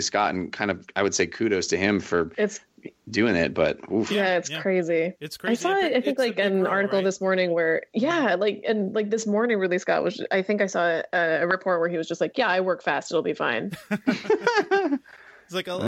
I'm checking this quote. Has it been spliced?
no; 0 cuts

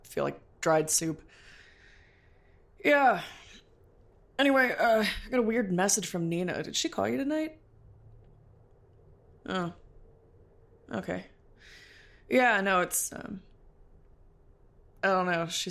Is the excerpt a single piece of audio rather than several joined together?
yes; 0 cuts

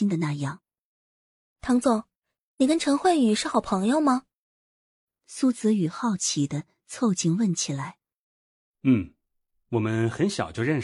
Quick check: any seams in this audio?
no; 0 cuts

